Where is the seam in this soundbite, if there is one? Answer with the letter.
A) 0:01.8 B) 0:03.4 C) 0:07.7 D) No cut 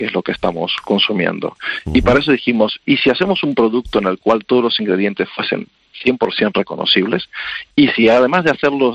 C